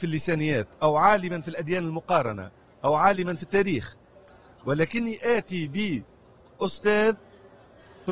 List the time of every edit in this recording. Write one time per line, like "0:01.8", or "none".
none